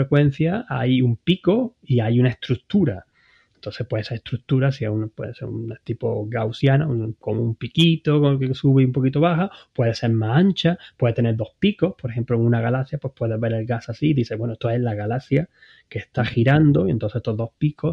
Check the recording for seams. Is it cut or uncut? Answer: uncut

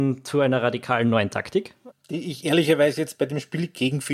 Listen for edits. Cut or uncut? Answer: cut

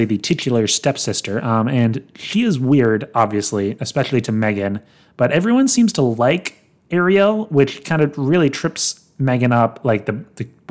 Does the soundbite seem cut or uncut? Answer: uncut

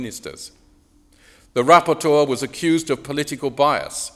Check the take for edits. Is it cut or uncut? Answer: uncut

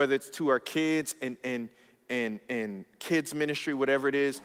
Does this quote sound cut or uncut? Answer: uncut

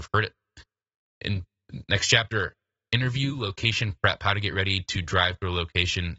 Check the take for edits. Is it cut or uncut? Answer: uncut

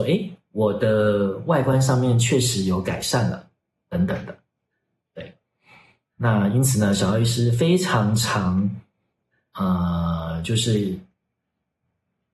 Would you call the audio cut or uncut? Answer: uncut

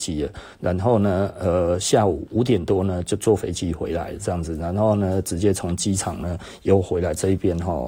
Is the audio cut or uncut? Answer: uncut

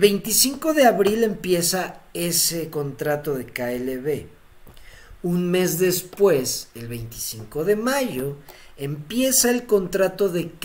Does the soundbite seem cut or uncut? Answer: uncut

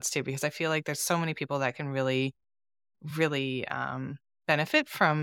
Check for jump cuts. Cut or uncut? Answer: uncut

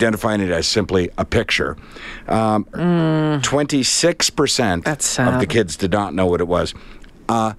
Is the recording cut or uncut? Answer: cut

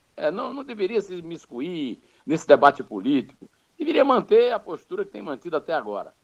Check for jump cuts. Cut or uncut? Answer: uncut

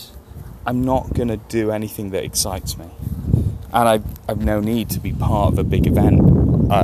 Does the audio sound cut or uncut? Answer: uncut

